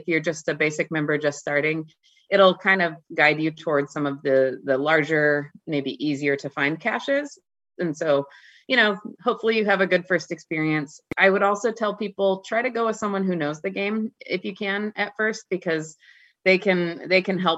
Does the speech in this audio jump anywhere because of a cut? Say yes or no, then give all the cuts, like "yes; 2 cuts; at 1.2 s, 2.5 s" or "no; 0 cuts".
no; 0 cuts